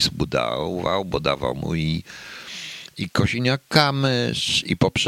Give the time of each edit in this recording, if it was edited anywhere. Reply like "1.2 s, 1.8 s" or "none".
none